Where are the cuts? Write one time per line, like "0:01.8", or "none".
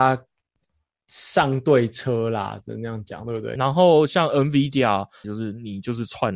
0:03.6
0:05.2